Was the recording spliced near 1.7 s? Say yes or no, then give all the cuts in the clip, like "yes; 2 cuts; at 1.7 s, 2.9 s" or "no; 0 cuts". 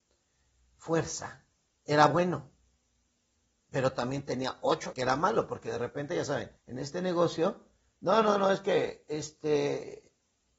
yes; 3 cuts; at 1.7 s, 4.9 s, 6.6 s